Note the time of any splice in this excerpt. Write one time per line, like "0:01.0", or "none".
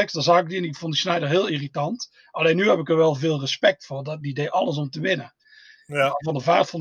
none